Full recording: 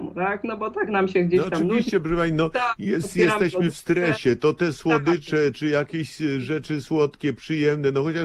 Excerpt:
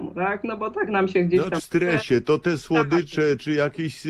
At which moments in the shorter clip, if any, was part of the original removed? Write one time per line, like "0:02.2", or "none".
0:01.6